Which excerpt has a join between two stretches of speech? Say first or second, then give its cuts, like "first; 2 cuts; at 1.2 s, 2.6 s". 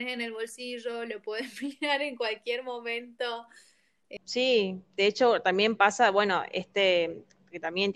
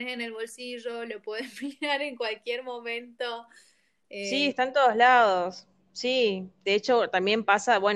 first; 1 cut; at 4.2 s